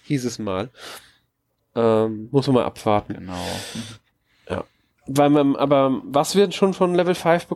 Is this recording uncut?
no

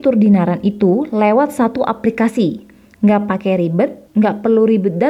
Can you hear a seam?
yes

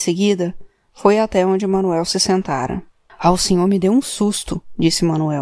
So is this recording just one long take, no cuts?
no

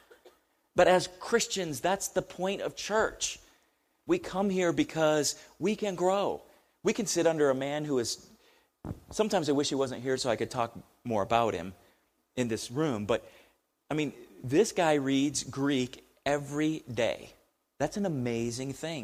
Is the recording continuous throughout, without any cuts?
no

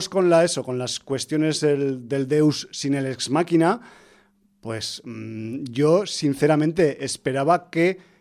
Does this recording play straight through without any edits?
yes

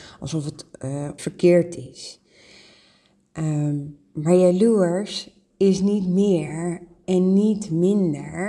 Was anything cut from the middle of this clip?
yes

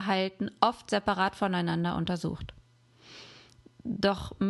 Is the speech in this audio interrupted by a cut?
no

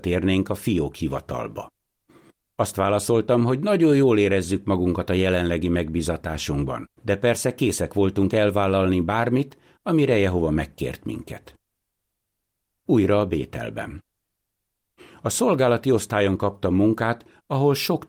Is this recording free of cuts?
no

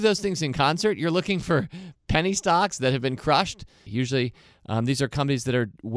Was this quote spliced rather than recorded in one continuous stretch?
yes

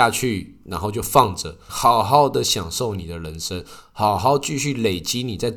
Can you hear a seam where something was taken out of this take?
yes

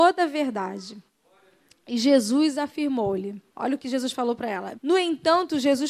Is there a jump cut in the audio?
yes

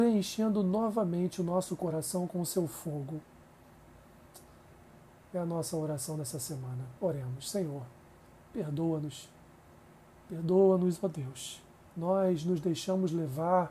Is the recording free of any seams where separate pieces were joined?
no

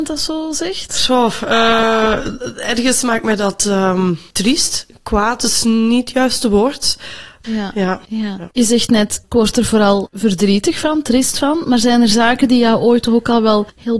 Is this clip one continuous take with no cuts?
no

